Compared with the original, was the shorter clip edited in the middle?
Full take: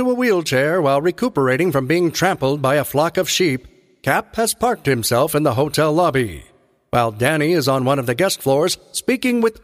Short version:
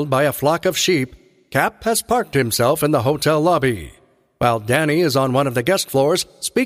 no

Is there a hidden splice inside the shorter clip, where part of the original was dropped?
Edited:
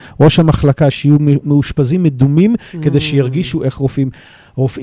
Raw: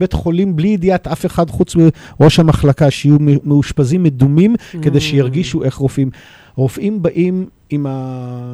no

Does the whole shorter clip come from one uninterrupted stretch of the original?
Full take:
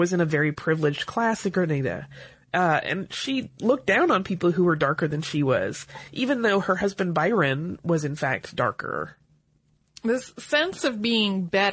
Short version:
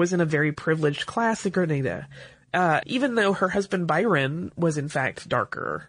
no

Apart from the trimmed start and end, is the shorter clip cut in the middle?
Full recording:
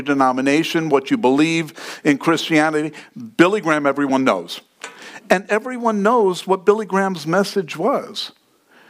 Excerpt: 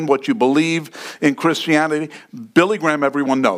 no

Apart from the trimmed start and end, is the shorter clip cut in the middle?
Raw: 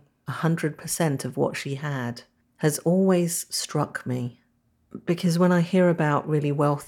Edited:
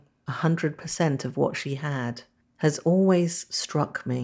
no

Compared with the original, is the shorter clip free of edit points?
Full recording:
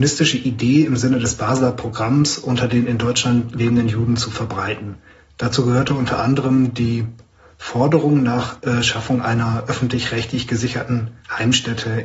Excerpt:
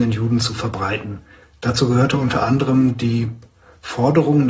yes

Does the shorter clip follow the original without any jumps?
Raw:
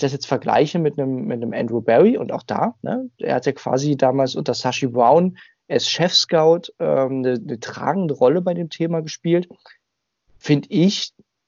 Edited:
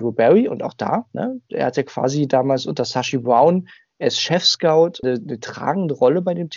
no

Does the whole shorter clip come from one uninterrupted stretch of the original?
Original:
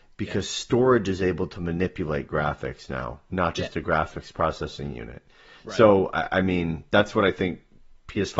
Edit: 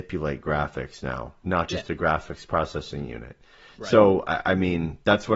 yes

